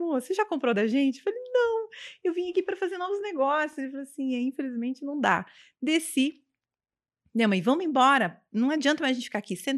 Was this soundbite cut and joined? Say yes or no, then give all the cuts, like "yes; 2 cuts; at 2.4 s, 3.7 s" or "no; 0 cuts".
no; 0 cuts